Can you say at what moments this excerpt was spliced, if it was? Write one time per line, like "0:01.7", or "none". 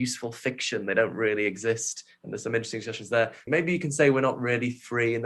0:03.5